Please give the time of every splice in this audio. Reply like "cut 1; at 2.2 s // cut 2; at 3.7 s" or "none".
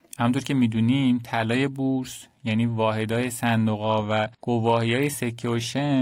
cut 1; at 4.3 s